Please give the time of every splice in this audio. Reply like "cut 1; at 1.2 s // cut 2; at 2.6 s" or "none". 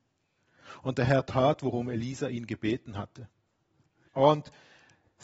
cut 1; at 4.1 s